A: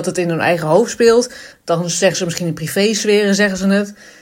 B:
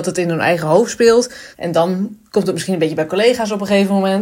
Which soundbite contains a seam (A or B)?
B